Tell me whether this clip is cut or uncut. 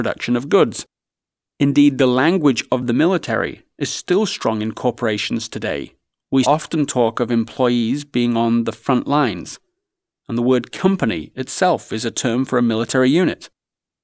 cut